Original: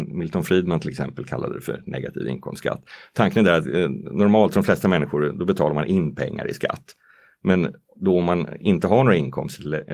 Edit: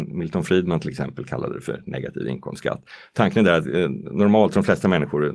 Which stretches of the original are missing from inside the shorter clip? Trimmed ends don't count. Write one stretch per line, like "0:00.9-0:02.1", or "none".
none